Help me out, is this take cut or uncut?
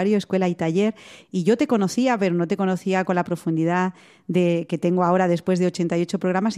cut